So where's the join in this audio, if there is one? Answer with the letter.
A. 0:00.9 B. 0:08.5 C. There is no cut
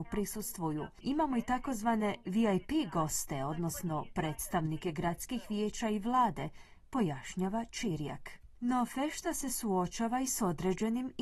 A